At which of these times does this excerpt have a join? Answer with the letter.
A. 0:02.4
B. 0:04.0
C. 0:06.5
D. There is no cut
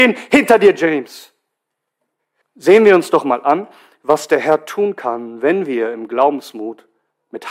A